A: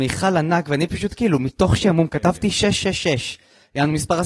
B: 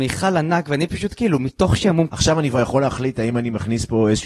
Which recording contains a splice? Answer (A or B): B